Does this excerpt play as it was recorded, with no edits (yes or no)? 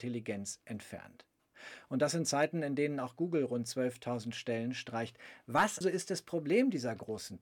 no